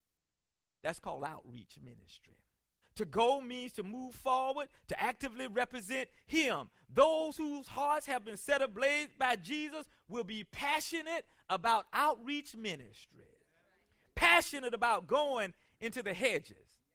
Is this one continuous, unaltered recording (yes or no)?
no